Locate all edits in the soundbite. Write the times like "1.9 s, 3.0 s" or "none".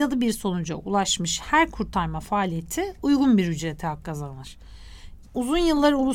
5.2 s